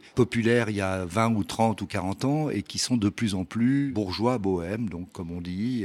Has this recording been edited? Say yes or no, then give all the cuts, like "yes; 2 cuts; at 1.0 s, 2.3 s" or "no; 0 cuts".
no; 0 cuts